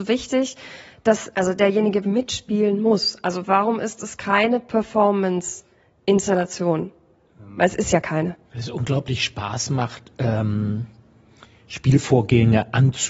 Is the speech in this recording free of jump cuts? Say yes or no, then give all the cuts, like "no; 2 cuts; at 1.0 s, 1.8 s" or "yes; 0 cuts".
no; 2 cuts; at 2.0 s, 8.5 s